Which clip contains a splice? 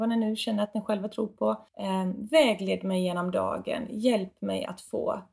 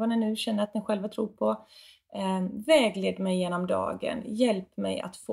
first; 1 cut; at 1.7 s

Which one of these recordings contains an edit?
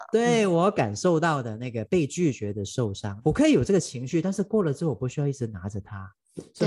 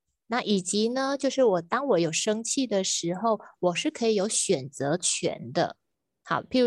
first; 1 cut; at 3.2 s

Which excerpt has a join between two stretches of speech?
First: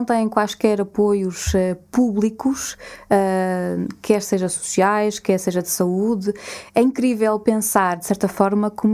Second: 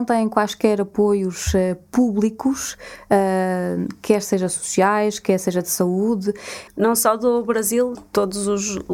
second; 2 cuts; at 6.7 s, 8.0 s

